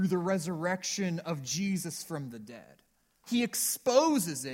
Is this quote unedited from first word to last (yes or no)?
no